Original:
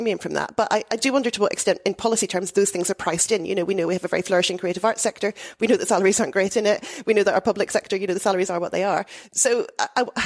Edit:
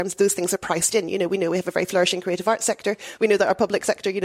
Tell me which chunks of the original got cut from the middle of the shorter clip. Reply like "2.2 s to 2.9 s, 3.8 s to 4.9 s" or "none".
5.5 s to 7.0 s